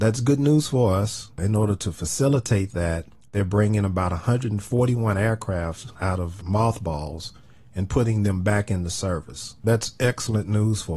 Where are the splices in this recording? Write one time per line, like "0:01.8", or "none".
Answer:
0:01.3